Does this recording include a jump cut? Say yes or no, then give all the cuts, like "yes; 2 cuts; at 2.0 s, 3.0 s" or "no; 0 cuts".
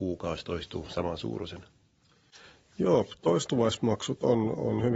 no; 0 cuts